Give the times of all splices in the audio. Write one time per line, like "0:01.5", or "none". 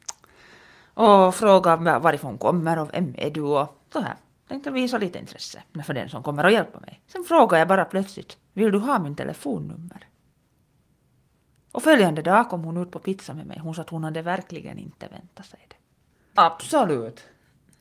0:07.0
0:16.4